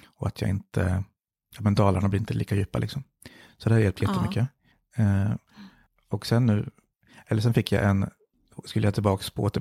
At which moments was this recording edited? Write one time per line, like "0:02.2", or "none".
none